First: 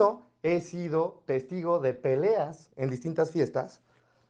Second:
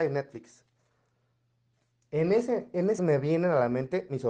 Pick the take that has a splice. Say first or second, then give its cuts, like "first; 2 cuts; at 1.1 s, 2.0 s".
second; 1 cut; at 3.0 s